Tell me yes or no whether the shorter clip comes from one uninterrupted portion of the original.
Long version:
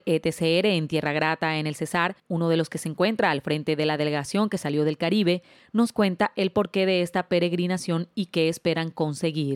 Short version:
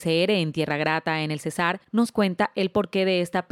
no